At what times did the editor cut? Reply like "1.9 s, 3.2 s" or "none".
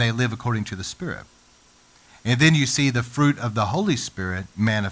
none

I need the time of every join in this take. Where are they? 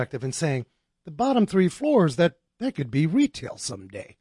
0.9 s

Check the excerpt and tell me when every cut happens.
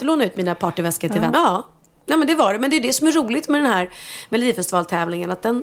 1.3 s

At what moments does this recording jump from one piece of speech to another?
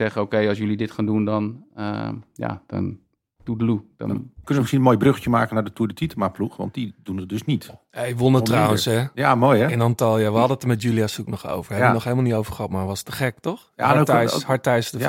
none

